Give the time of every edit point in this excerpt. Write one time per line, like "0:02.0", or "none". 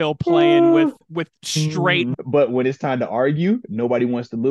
0:01.1
0:02.1